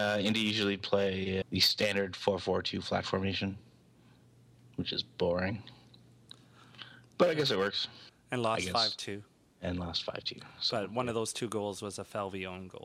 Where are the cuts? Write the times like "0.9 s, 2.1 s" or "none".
1.4 s, 8.1 s